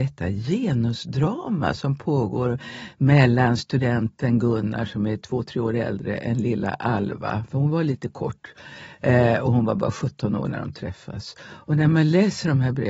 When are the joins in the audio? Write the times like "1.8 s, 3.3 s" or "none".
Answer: none